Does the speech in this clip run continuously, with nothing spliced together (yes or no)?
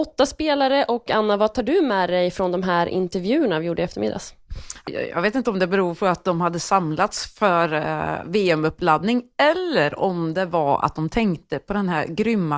no